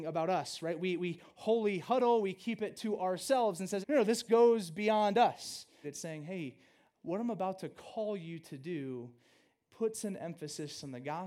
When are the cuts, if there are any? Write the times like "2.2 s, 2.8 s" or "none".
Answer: 3.8 s, 5.8 s